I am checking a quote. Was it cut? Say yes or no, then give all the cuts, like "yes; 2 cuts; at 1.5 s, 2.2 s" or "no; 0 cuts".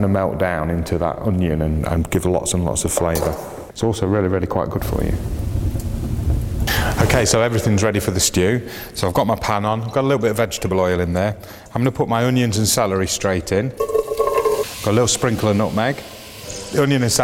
no; 0 cuts